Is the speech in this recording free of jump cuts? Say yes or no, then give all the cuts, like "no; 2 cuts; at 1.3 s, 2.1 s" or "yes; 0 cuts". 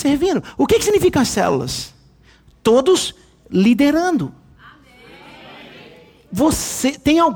yes; 0 cuts